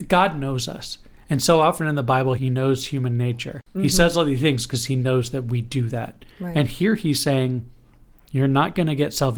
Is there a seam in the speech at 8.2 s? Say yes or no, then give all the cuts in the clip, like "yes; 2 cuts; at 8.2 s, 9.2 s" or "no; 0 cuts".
no; 2 cuts; at 2.4 s, 3.7 s